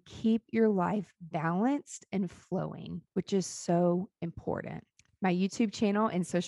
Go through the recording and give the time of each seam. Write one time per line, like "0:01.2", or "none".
none